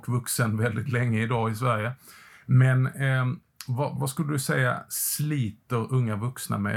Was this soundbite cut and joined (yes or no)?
yes